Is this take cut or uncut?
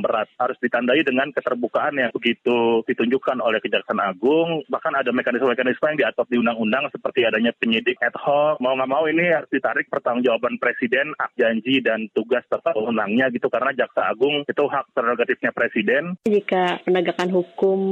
cut